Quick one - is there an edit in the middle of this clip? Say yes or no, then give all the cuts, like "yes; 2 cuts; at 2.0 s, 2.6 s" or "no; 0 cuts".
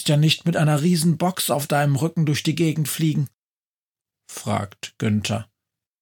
yes; 1 cut; at 4.1 s